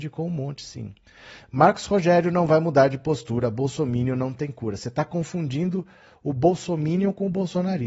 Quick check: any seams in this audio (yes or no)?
no